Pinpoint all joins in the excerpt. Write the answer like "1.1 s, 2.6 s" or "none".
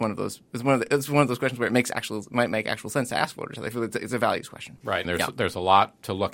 5.0 s